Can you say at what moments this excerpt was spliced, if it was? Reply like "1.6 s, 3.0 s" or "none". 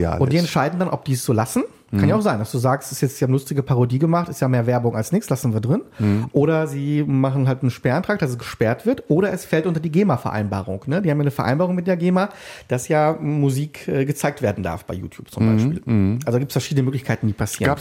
none